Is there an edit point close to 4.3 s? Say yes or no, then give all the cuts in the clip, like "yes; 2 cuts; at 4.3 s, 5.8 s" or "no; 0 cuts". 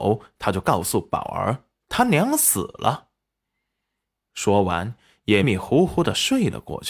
yes; 2 cuts; at 4.3 s, 5.4 s